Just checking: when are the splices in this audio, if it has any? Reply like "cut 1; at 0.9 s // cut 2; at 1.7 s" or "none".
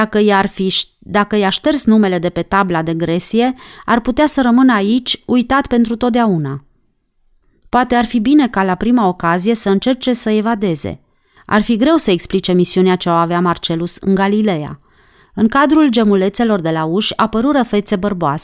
cut 1; at 11.4 s // cut 2; at 15.2 s